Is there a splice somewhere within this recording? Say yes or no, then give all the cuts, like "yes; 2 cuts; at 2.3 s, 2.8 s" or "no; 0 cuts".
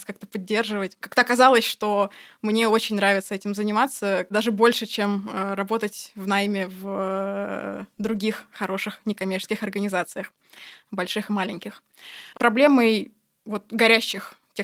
yes; 2 cuts; at 1.0 s, 12.3 s